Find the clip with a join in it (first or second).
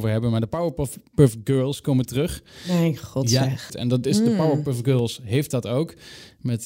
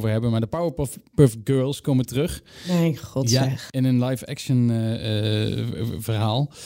first